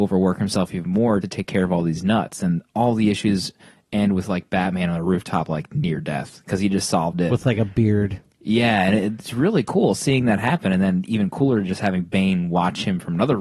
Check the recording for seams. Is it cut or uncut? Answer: cut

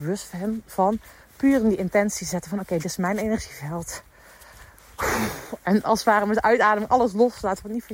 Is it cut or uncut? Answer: cut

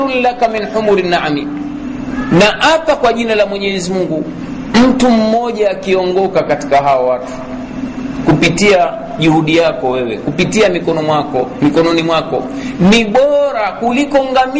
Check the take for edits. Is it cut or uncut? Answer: uncut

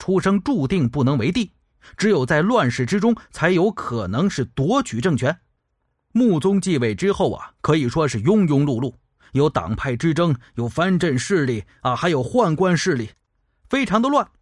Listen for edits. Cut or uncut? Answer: uncut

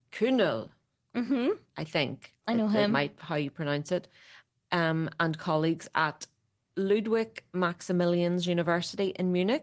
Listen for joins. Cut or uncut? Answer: uncut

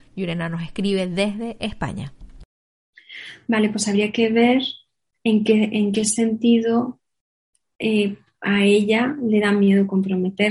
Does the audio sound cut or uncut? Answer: uncut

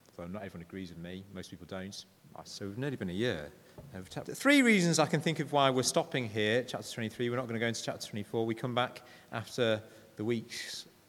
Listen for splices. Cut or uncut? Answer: cut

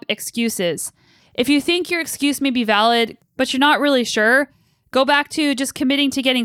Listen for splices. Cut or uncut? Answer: cut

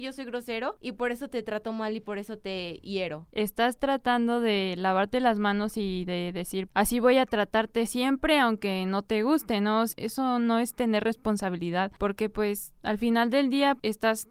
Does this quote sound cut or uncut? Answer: cut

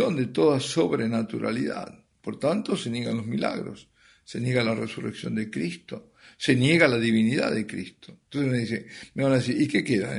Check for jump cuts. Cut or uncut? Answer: uncut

